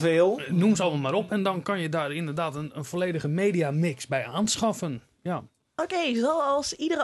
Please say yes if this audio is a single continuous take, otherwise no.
yes